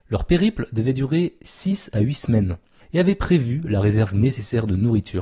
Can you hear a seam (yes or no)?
yes